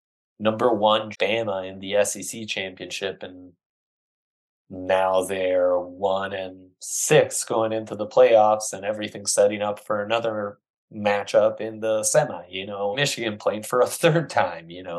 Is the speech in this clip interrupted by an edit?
yes; 2 cuts; at 1.1 s, 12.9 s

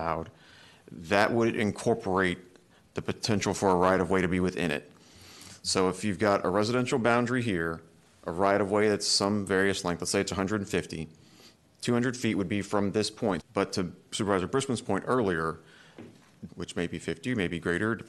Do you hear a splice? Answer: yes; 2 cuts; at 13.4 s, 16.5 s

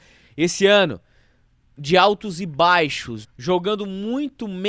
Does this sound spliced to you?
yes; 1 cut; at 3.2 s

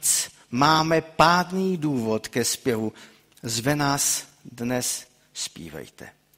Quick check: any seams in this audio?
no; 0 cuts

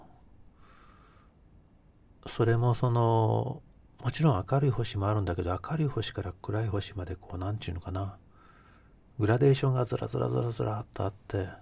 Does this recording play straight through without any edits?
yes; 0 cuts

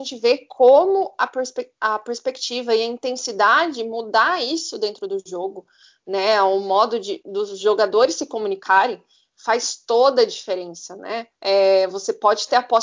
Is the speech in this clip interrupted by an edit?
yes; 1 cut; at 11.3 s

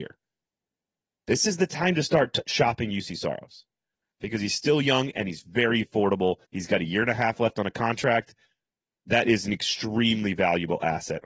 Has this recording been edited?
yes; 1 cut; at 6.4 s

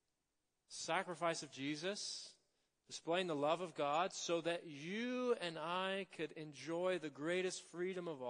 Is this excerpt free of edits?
yes; 0 cuts

